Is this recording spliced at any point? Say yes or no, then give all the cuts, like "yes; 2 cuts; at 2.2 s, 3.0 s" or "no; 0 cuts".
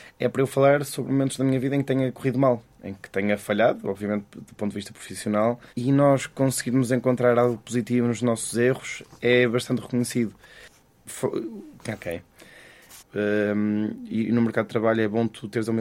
yes; 3 cuts; at 5.7 s, 11.8 s, 13.0 s